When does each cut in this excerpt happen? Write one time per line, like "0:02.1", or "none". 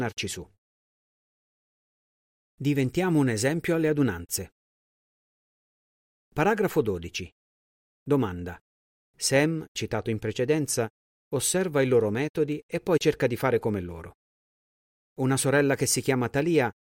0:09.0
0:11.2

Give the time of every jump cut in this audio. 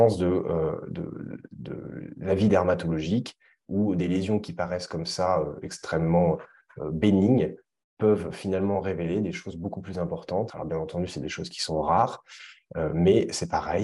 0:10.5

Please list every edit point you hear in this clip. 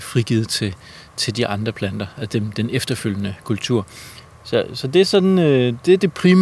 none

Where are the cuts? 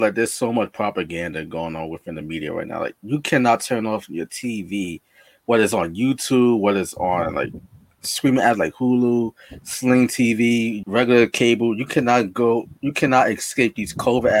0:10.8

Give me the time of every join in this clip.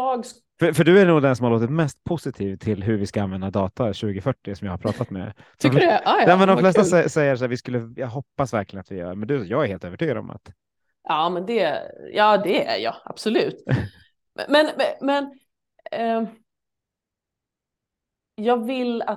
none

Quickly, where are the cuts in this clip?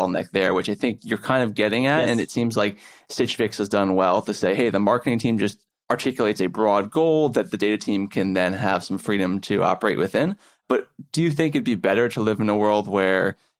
none

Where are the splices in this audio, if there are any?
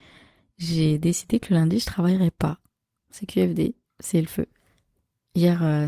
0:02.9

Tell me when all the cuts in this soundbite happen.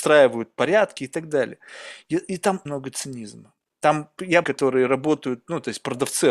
0:02.7
0:04.4

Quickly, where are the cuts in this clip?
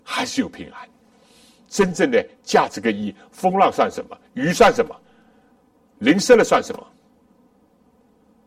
0:01.7

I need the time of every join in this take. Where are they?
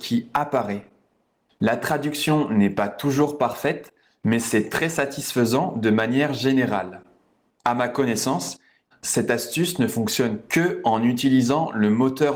0:08.9

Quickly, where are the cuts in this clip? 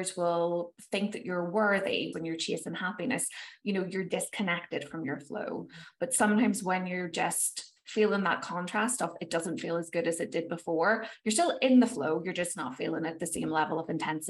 0:02.1

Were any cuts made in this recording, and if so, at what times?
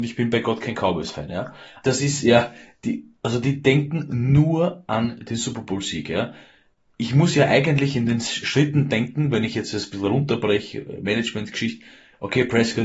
0:01.8

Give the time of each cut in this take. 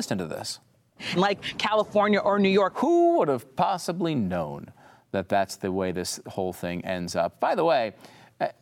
0:01.2
0:02.7

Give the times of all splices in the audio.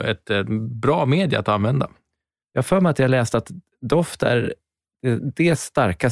0:02.4

